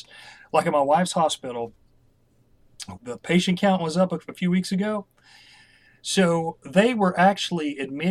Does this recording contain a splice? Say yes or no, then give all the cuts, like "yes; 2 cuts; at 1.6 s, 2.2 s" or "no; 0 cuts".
yes; 1 cut; at 3.0 s